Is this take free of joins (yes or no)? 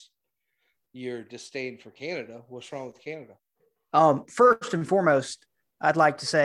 yes